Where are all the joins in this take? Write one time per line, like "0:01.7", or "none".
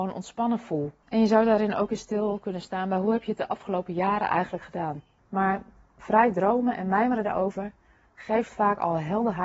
0:01.0
0:05.2